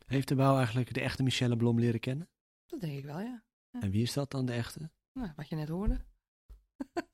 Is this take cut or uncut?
uncut